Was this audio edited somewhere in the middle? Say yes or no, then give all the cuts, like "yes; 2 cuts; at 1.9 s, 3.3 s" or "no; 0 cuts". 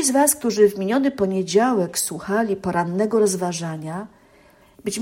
no; 0 cuts